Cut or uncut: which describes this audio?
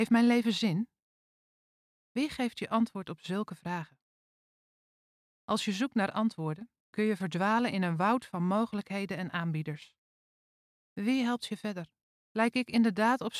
cut